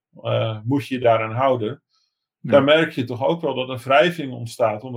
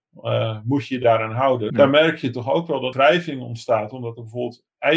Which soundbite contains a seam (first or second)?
second